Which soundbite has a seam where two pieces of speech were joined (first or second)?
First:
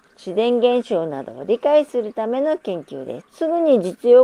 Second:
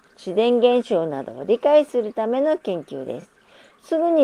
first